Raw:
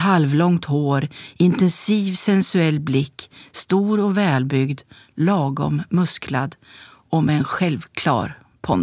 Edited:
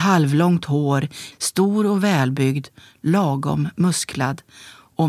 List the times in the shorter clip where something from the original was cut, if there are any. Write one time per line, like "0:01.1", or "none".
0:01.3